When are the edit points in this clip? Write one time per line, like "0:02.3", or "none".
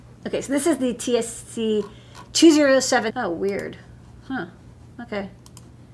0:03.1